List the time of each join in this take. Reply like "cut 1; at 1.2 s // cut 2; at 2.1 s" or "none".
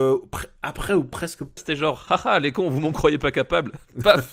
cut 1; at 1.6 s